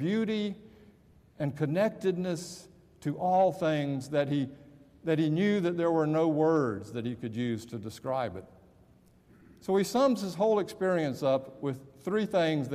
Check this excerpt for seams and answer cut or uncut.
uncut